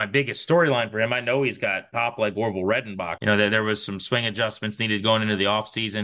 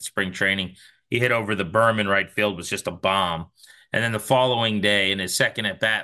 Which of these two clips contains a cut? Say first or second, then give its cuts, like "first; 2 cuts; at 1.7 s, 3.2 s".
first; 1 cut; at 3.2 s